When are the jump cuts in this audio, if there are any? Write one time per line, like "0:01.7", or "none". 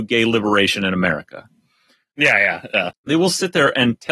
0:02.9